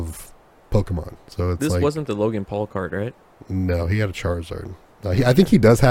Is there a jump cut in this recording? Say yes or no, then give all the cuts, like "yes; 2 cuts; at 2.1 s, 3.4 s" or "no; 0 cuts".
no; 0 cuts